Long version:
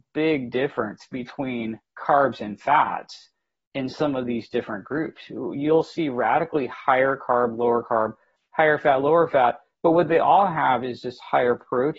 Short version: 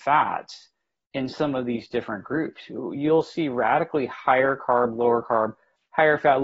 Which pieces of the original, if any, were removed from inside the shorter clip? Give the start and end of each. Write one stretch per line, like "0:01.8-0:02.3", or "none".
none